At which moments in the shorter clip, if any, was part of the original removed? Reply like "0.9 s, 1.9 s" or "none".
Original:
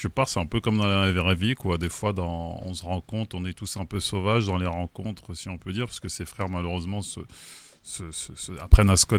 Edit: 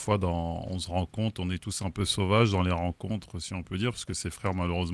none